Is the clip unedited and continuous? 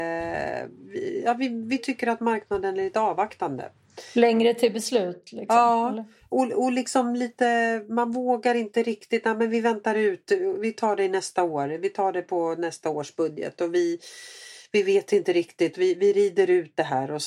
yes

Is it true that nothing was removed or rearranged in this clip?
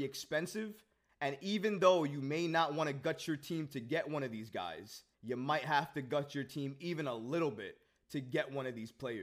no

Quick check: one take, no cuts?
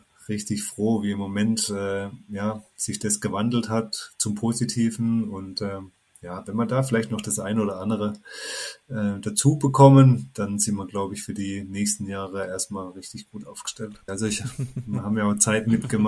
no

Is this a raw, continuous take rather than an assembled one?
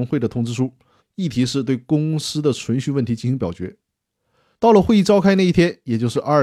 no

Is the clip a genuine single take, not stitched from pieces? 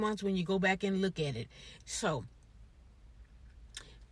no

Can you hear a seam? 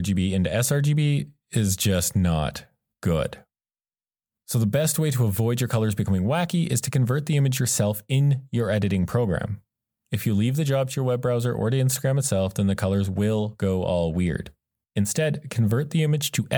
no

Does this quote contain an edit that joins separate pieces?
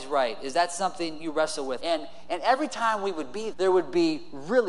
yes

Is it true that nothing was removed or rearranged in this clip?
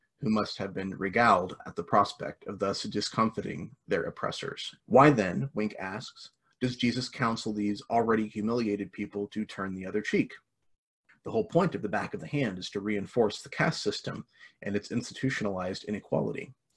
no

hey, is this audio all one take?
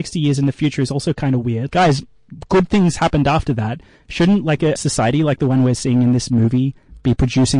no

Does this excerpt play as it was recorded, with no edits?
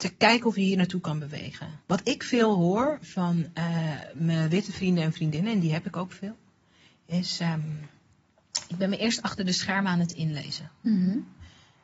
no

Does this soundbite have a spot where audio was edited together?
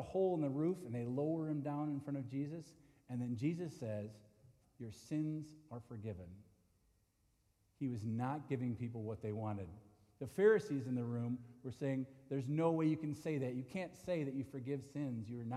yes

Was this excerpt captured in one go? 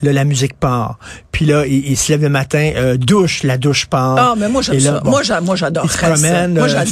yes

